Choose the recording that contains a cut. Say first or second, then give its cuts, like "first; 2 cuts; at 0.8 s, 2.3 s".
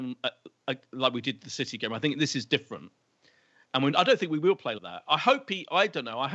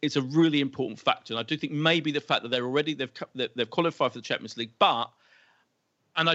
first; 1 cut; at 4.8 s